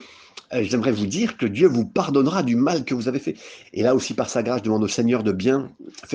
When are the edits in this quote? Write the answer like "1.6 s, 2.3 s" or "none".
3.6 s